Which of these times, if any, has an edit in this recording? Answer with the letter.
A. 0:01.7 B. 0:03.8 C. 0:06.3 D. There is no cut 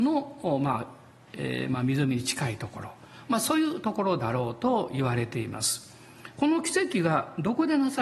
C